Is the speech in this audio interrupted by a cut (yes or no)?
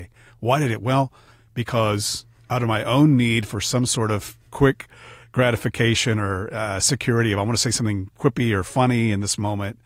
no